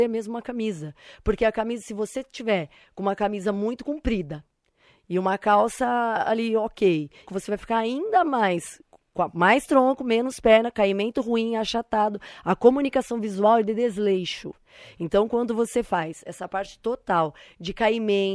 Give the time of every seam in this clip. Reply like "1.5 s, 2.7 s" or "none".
7.3 s